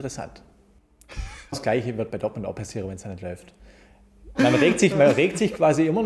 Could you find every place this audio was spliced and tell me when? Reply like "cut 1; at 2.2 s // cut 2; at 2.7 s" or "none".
cut 1; at 1.5 s // cut 2; at 4.3 s